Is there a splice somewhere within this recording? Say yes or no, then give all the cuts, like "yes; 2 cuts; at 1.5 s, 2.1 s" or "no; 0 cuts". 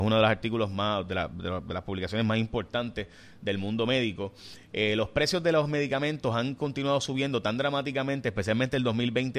no; 0 cuts